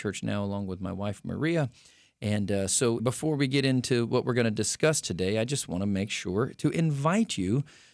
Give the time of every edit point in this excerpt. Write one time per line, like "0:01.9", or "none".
0:03.0